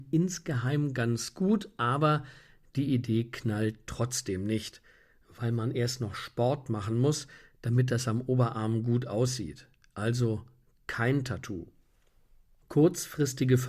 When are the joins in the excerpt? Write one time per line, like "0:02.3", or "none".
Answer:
none